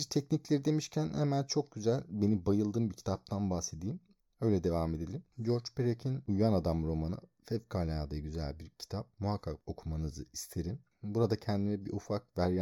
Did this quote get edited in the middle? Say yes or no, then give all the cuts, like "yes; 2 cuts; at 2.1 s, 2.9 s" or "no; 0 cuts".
no; 0 cuts